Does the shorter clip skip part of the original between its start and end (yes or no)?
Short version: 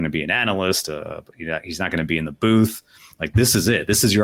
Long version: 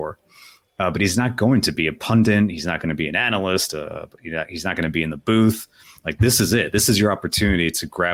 no